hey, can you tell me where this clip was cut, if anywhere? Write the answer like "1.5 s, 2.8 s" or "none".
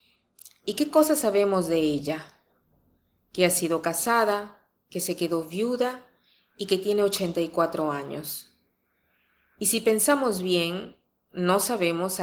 none